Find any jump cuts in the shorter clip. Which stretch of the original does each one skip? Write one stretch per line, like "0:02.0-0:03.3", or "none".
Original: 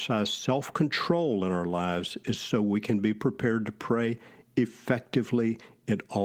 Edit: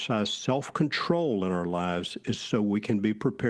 none